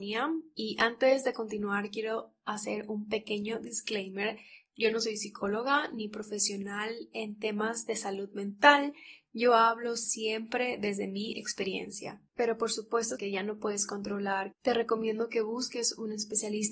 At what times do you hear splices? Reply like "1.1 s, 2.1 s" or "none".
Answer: 13.1 s, 14.5 s